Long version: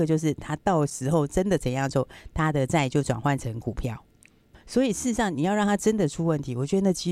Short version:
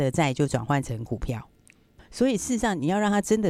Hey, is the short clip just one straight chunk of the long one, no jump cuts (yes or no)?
yes